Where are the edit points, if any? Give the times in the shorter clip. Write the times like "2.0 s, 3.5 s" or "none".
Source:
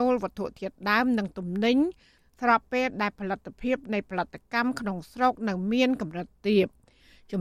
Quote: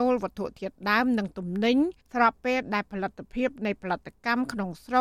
2.0 s